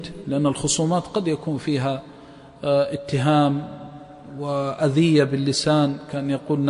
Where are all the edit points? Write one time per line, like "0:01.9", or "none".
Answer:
none